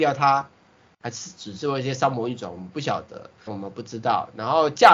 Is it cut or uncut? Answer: cut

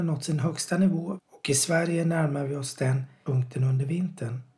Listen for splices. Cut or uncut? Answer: cut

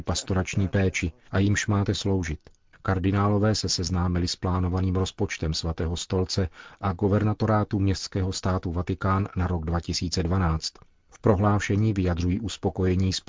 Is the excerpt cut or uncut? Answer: cut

